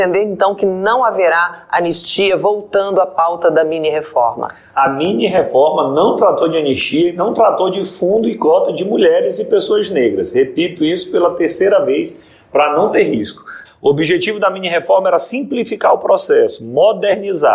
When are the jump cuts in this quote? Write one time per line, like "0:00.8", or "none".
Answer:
0:13.7